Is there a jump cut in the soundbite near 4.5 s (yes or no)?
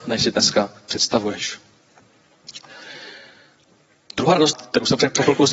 yes